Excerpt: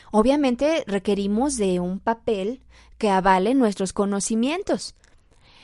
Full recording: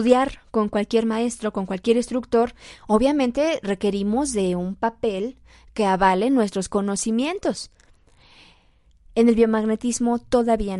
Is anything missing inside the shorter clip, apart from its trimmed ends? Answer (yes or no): no